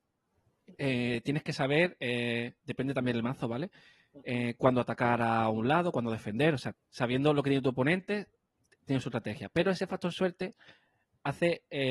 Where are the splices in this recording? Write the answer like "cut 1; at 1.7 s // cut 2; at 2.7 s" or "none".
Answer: cut 1; at 6.7 s

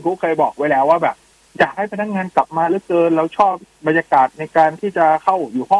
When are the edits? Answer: none

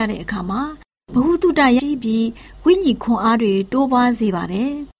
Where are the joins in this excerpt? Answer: cut 1; at 1.8 s

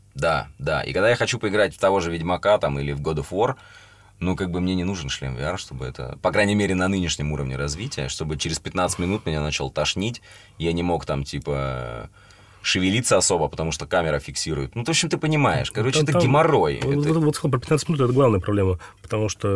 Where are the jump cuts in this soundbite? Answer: none

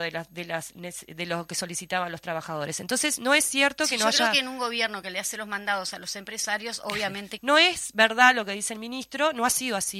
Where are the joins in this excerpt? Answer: cut 1; at 7.4 s

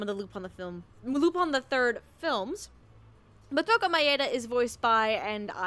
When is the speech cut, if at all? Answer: cut 1; at 0.9 s

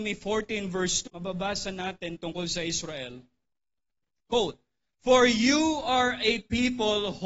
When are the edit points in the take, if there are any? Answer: cut 1; at 1.1 s

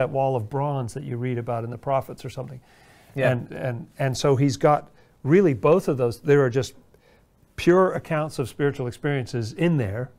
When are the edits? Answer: cut 1; at 3.5 s

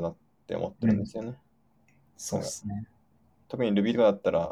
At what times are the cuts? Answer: none

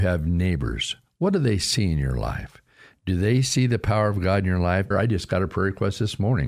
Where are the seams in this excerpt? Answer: cut 1; at 4.9 s

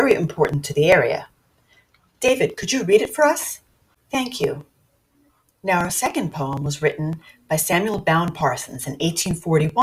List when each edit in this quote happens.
cut 1; at 4.0 s

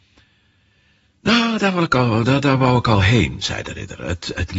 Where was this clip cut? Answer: none

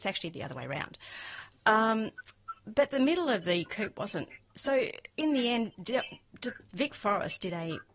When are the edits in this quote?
cut 1; at 5.1 s

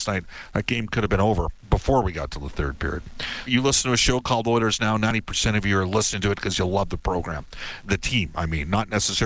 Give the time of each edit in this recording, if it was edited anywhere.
cut 1; at 3.5 s // cut 2; at 7.8 s

